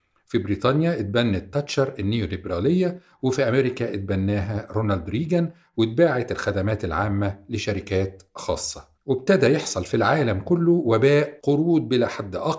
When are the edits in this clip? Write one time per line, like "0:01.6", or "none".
0:08.9
0:11.4